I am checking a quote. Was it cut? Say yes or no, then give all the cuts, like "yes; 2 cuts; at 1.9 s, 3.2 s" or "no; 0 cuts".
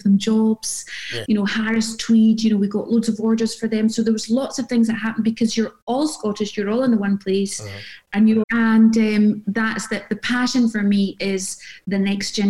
yes; 3 cuts; at 1.3 s, 8.4 s, 9.4 s